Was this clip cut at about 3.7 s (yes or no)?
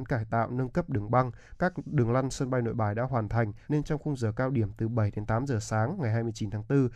yes